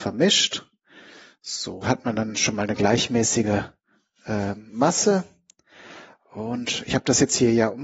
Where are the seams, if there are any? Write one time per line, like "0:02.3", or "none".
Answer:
0:01.8